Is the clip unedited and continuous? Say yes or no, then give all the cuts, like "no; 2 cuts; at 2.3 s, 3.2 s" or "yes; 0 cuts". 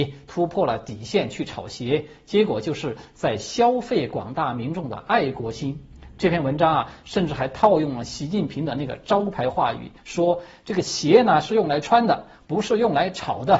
yes; 0 cuts